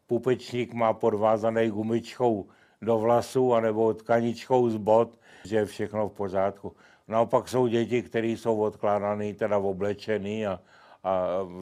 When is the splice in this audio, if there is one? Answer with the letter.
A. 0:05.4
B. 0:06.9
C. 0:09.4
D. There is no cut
A